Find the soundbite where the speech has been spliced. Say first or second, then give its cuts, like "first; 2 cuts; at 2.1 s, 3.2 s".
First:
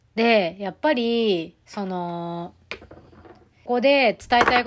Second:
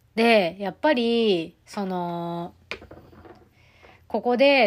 first; 1 cut; at 3.7 s